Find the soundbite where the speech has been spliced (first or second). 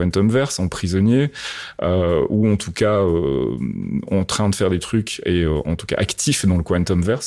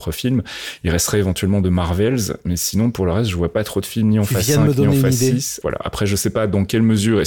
second